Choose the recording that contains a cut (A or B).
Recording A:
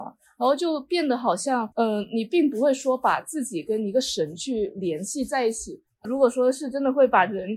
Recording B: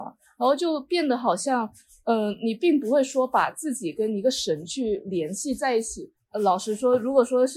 A